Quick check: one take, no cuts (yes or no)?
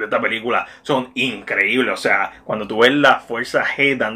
yes